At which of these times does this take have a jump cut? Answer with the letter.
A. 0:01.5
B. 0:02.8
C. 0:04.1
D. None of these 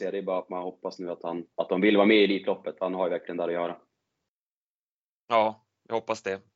A